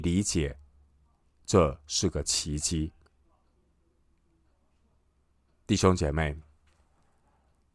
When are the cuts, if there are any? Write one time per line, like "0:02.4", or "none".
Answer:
none